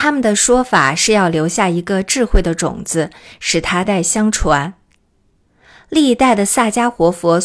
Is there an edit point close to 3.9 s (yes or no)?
yes